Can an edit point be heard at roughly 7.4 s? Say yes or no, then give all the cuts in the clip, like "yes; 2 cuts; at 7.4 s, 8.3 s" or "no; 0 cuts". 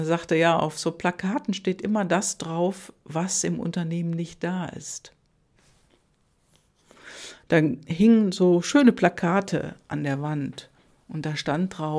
yes; 1 cut; at 7.4 s